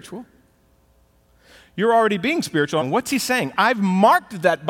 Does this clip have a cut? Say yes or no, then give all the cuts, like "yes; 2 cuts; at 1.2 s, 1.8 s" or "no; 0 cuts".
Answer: yes; 1 cut; at 2.8 s